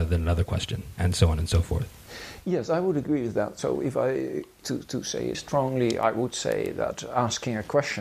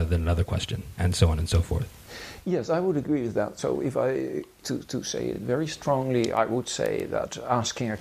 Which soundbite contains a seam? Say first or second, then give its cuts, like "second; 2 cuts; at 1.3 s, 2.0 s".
first; 1 cut; at 5.3 s